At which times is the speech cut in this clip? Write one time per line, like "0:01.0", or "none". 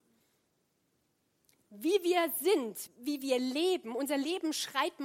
0:02.9